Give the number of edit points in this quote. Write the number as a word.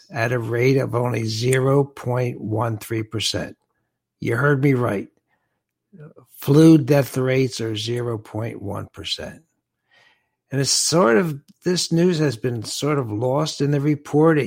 zero